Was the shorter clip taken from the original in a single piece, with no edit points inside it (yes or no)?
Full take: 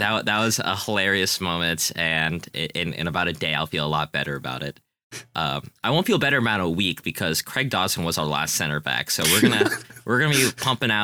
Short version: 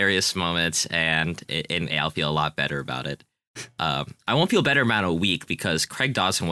no